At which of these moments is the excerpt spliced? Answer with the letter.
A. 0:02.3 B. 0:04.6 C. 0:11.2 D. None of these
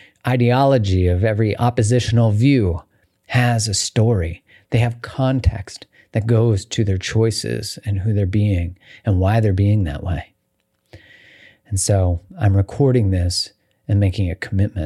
D